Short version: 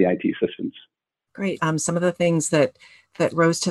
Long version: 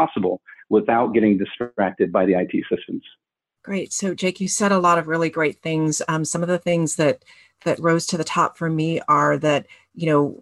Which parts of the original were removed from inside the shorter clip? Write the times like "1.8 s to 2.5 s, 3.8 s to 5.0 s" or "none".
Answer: 3.9 s to 6.1 s